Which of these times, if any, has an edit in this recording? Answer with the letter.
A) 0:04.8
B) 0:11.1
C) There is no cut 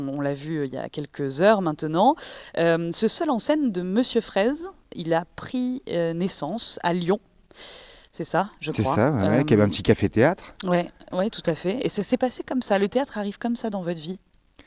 B